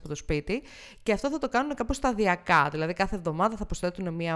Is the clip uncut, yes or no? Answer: yes